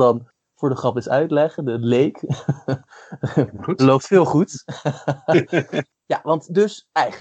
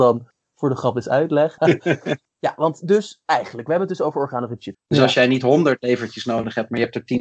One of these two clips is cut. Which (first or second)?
second